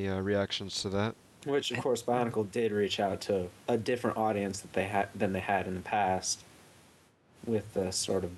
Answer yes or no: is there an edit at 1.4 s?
yes